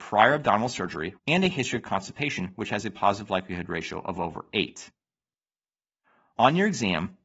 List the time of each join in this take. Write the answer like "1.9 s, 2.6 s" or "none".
1.2 s